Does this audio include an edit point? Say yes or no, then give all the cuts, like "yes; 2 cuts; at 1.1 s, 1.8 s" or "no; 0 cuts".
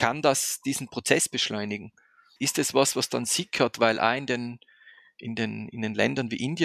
yes; 1 cut; at 2.4 s